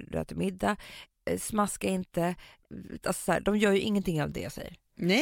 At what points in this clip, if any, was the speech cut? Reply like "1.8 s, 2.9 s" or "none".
3.0 s